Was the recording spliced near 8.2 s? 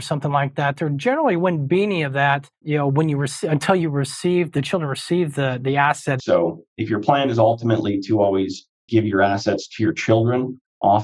no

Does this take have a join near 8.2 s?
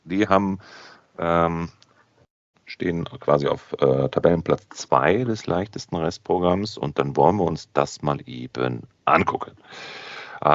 no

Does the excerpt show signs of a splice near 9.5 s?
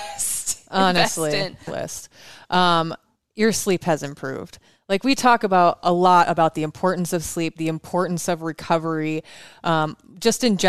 no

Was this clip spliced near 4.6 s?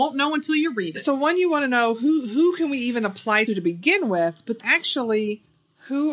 yes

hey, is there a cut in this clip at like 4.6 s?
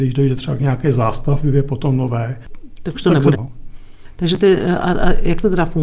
no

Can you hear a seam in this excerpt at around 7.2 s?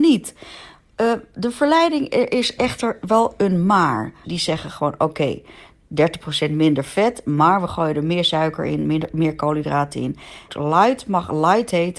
no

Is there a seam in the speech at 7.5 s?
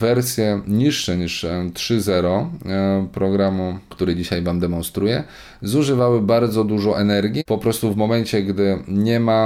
yes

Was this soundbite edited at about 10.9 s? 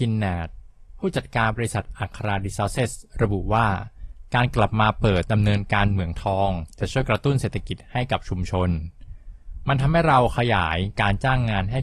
no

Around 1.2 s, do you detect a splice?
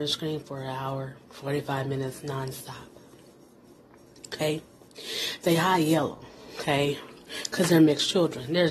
yes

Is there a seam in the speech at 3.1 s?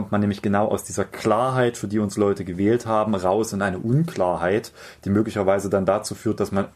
no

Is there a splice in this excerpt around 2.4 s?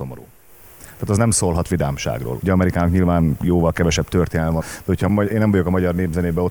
yes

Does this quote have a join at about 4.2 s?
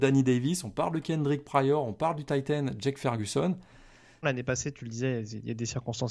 yes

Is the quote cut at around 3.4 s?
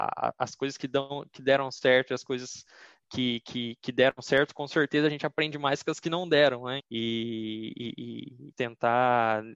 no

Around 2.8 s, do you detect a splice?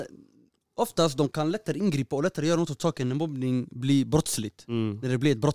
no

